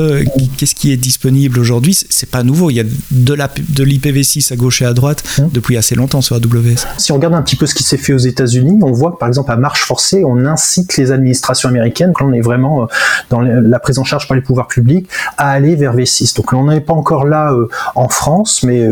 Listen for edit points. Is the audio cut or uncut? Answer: cut